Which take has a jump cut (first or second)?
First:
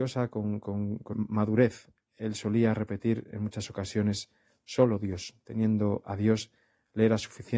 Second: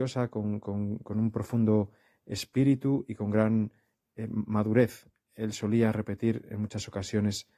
first